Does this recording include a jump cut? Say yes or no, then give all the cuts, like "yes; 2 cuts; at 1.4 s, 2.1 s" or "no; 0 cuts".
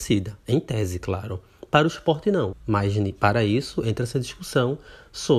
yes; 1 cut; at 2.5 s